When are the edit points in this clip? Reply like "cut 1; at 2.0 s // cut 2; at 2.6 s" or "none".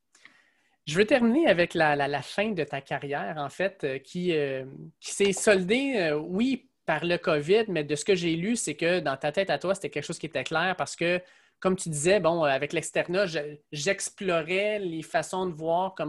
none